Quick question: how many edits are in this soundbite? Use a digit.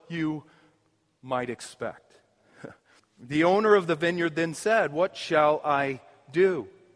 1